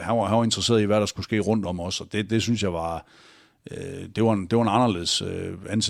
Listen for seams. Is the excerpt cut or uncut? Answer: uncut